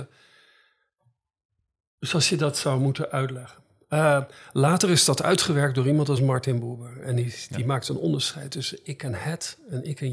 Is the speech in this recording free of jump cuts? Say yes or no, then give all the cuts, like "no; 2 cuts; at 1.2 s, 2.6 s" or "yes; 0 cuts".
yes; 0 cuts